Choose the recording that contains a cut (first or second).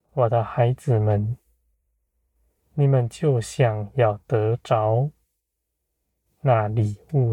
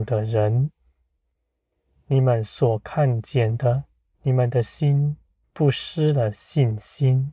second